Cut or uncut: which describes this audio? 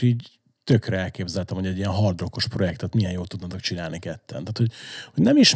uncut